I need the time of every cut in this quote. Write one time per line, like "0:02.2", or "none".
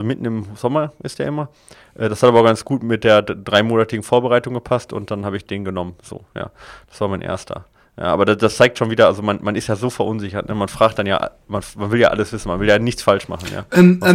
none